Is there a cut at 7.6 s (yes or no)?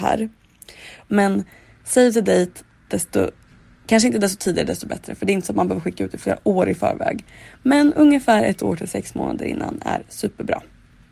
no